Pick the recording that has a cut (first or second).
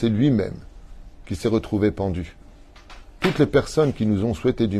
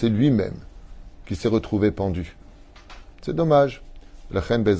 second